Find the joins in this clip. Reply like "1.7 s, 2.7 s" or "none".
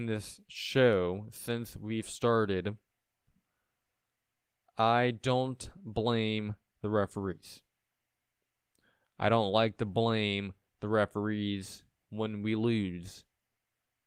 none